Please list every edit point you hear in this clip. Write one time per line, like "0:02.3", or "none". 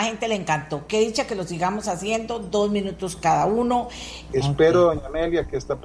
0:04.3